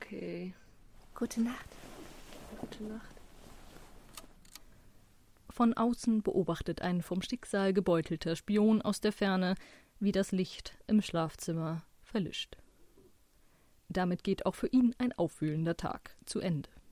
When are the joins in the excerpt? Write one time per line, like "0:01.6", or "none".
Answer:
none